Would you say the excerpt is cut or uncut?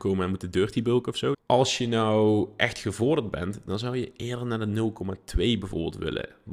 cut